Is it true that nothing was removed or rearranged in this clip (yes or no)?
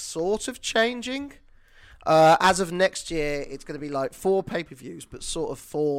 yes